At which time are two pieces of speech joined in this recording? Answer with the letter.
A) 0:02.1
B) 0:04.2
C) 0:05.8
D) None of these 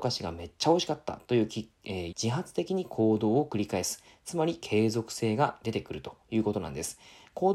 A